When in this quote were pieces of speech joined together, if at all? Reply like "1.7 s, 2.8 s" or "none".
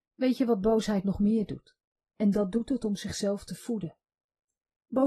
2.1 s